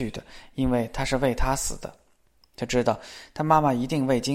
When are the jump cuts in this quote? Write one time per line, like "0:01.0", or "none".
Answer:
0:02.4

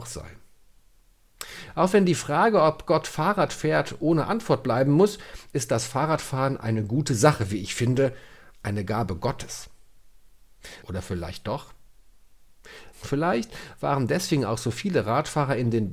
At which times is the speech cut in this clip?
0:10.8
0:12.9

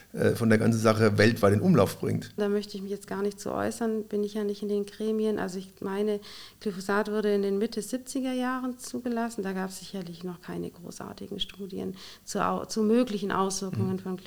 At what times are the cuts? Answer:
0:02.4

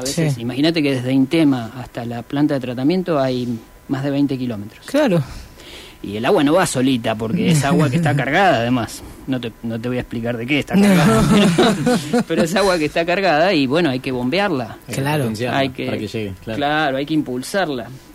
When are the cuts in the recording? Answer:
none

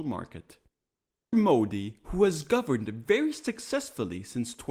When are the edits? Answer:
0:01.3

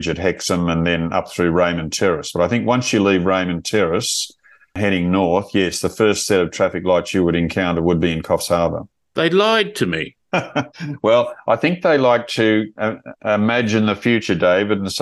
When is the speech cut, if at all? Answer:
none

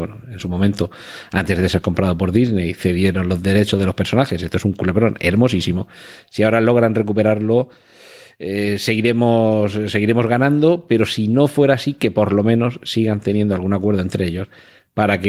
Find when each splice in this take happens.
none

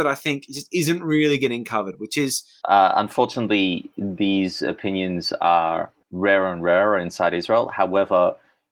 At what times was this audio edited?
0:02.6
0:06.0

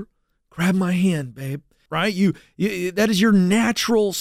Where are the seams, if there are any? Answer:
0:01.9

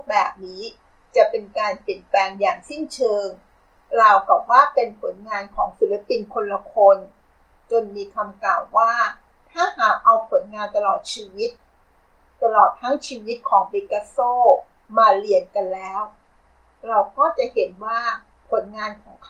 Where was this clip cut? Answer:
none

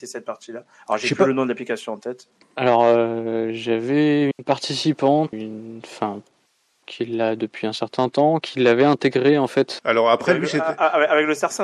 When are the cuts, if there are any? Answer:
0:02.4
0:05.3
0:09.8

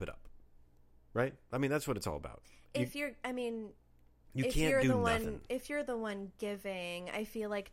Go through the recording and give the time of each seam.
none

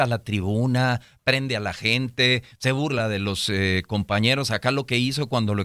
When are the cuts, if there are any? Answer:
none

